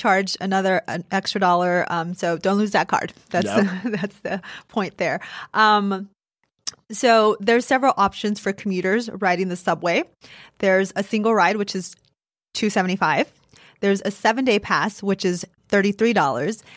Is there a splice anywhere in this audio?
no; 0 cuts

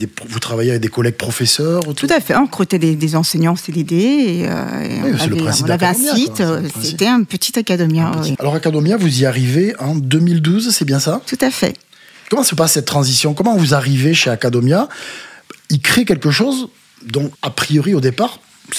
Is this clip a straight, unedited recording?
no; 2 cuts; at 8.4 s, 17.4 s

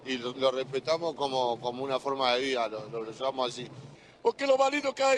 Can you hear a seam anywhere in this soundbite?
no; 0 cuts

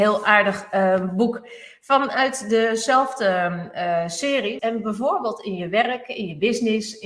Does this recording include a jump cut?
yes; 1 cut; at 4.6 s

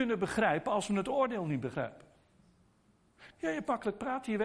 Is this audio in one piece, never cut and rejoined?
no; 1 cut; at 3.3 s

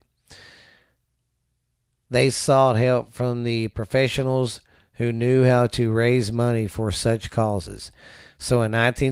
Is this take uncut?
yes; 0 cuts

